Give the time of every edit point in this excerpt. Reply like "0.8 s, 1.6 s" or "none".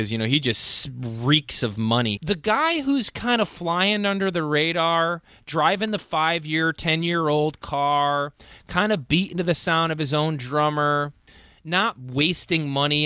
2.2 s